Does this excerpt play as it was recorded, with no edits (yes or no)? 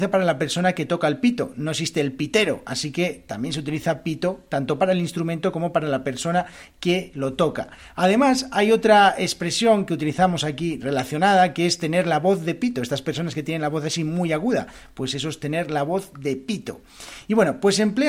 yes